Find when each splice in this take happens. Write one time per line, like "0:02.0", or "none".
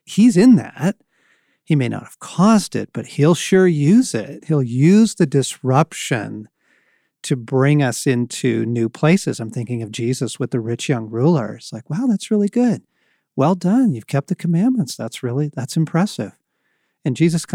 none